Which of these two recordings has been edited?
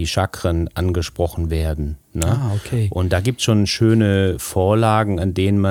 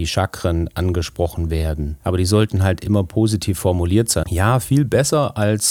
second; 2 cuts; at 2.0 s, 4.2 s

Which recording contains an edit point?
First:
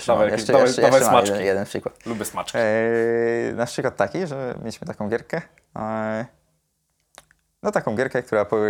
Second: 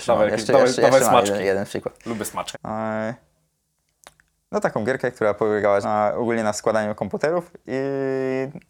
second; 2 cuts; at 2.5 s, 5.8 s

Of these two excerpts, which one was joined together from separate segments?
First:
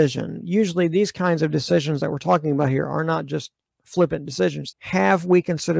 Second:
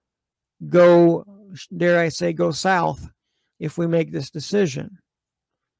first; 1 cut; at 4.7 s

